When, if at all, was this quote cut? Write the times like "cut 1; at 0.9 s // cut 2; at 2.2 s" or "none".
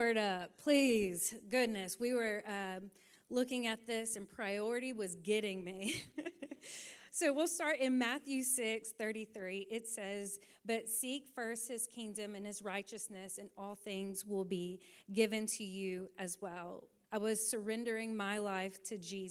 cut 1; at 17.0 s